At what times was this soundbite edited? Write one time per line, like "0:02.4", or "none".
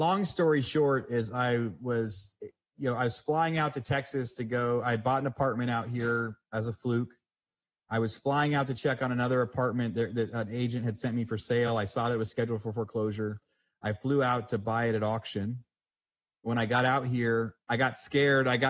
none